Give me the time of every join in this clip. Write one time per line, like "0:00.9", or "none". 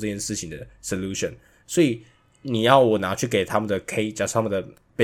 0:01.6